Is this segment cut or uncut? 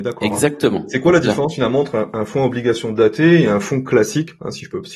uncut